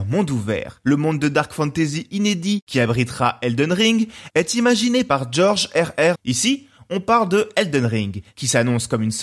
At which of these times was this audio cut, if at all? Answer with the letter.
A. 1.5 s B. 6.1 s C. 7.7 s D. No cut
B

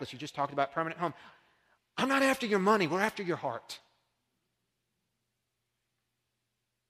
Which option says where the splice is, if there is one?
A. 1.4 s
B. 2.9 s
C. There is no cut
C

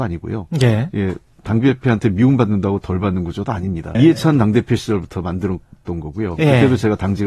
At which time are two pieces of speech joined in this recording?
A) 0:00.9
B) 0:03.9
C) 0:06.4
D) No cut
B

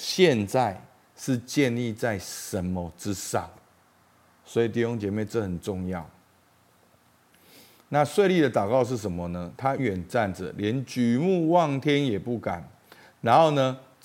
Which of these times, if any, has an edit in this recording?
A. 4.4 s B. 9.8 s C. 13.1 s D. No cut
B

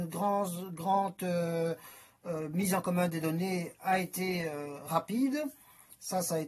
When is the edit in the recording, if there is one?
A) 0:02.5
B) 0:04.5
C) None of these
C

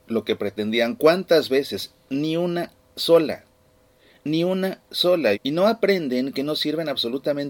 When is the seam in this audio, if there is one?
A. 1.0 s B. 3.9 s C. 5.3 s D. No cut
C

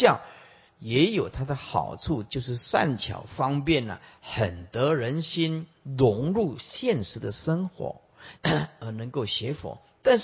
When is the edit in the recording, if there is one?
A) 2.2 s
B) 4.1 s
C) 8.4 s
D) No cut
C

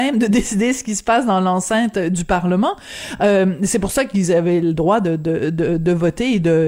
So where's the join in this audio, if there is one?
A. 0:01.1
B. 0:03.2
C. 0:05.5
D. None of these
D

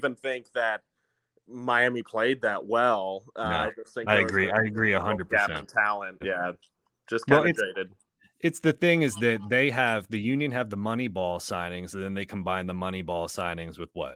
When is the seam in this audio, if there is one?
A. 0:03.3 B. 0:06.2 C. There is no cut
B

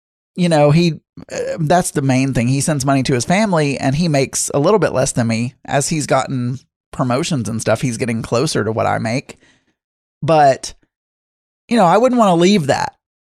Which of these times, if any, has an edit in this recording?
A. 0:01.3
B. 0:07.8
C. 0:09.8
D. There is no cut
D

